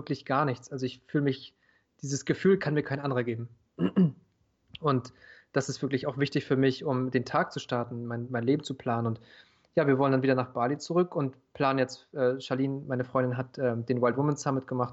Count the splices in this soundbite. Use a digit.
0